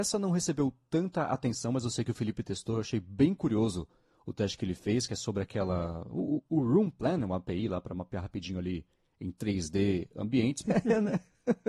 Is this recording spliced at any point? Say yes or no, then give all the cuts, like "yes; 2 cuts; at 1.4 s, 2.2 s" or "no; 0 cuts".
yes; 1 cut; at 10.6 s